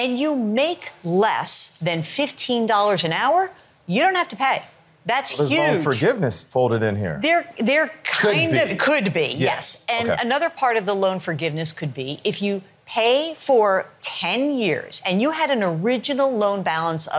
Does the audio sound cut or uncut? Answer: uncut